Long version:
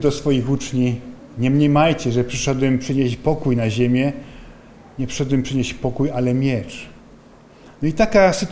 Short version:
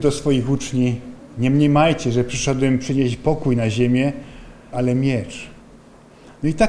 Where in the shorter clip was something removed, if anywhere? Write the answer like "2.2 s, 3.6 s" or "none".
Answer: 4.7 s